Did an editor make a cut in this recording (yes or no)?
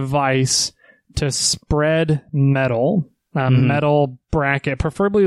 no